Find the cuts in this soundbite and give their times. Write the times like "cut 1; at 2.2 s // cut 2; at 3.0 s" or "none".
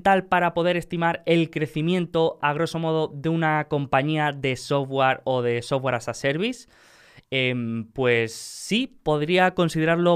none

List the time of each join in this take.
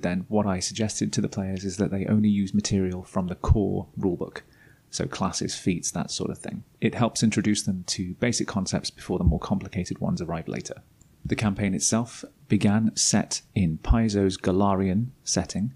none

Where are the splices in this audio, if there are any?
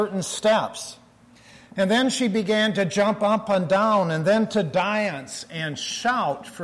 none

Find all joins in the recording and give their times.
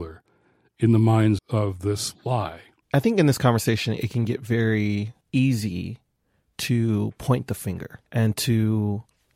cut 1; at 1.4 s // cut 2; at 5.2 s // cut 3; at 8.1 s

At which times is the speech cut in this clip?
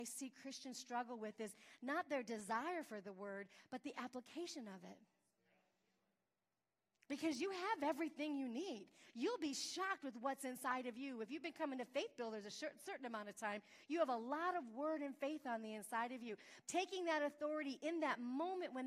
cut 1; at 16.6 s

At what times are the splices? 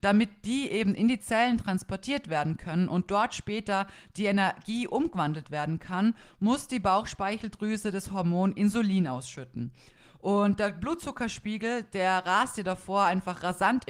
none

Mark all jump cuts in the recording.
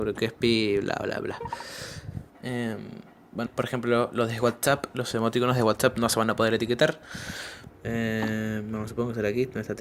cut 1; at 2.3 s // cut 2; at 3.5 s // cut 3; at 7.7 s

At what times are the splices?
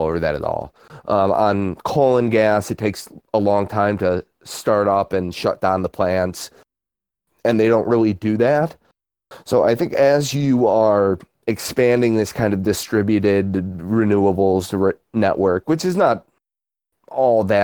none

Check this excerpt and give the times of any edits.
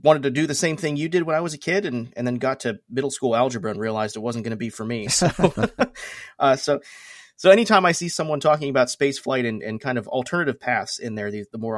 none

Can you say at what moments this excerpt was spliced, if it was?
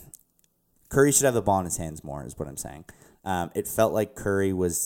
none

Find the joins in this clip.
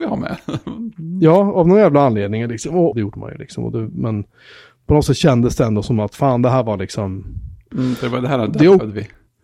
cut 1; at 2.9 s

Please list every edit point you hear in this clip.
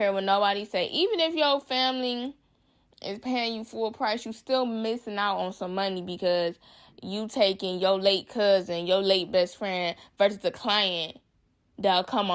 none

